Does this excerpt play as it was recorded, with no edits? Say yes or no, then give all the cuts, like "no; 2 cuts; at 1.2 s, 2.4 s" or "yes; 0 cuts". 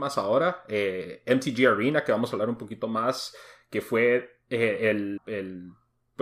no; 1 cut; at 5.2 s